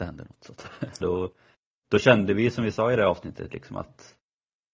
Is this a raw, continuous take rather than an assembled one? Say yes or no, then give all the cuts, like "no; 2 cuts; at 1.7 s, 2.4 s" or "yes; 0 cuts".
no; 1 cut; at 1.0 s